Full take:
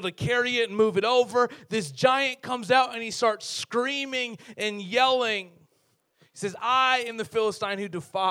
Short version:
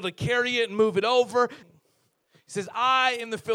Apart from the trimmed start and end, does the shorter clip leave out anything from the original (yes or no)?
yes